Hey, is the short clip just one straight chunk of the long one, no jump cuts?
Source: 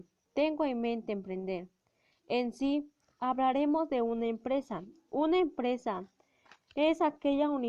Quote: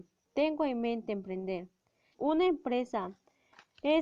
no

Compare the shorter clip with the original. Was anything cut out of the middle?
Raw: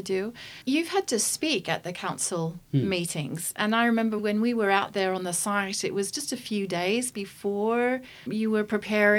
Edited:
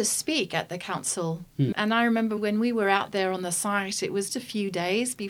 yes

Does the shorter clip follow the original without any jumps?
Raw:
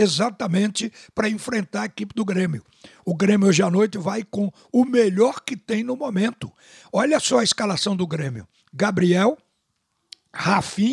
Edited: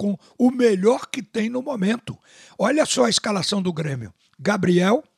yes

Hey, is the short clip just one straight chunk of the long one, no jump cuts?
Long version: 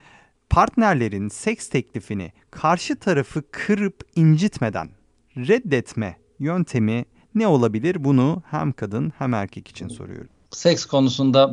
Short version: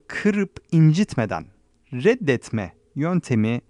yes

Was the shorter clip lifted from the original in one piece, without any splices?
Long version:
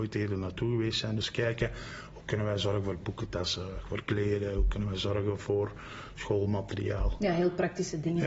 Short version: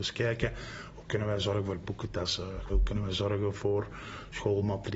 no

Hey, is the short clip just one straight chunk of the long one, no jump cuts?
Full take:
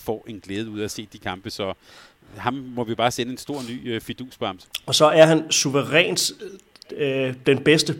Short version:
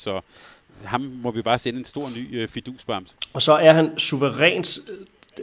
yes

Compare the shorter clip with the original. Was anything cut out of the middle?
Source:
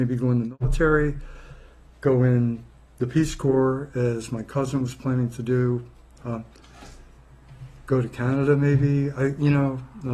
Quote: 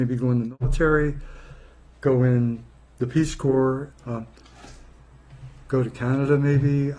yes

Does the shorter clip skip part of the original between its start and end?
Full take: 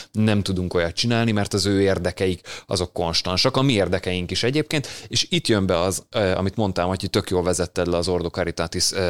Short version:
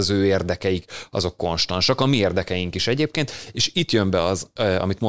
no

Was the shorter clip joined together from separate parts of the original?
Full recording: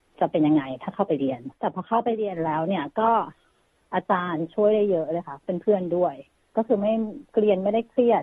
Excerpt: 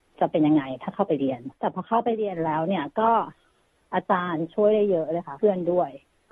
yes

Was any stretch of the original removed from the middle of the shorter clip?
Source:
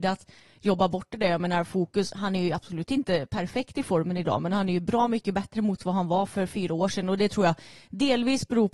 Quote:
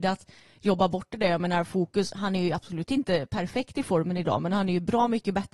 no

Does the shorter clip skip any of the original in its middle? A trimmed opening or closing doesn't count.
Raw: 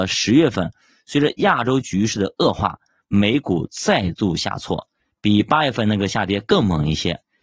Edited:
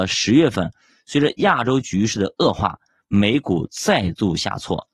no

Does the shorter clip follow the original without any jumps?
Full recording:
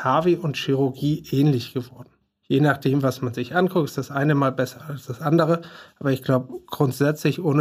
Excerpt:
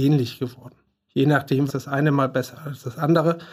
no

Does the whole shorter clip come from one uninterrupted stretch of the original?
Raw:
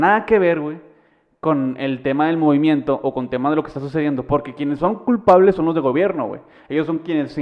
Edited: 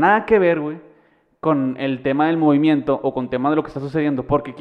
yes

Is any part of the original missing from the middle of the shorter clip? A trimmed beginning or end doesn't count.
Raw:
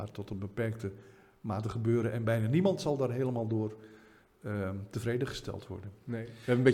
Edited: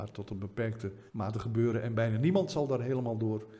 yes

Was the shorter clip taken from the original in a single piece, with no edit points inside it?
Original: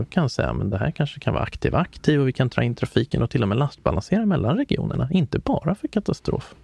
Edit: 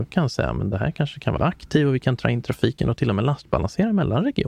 no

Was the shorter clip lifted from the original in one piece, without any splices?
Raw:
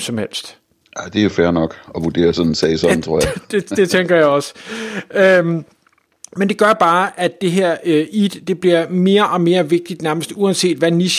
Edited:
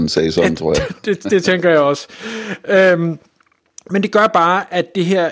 yes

